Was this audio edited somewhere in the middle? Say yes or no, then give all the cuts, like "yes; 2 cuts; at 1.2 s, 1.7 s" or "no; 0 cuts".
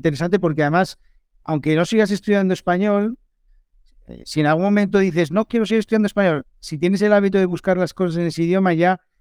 no; 0 cuts